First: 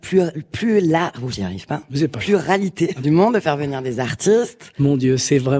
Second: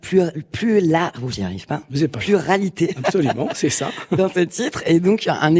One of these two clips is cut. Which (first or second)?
first